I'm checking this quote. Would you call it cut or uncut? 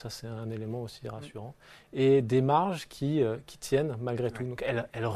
uncut